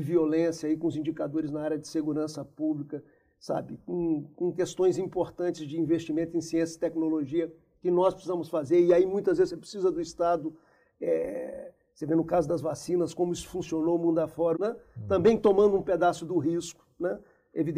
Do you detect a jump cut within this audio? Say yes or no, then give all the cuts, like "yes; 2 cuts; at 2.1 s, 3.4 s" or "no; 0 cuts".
yes; 1 cut; at 14.5 s